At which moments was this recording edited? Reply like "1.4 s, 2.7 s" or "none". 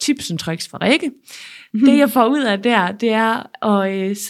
none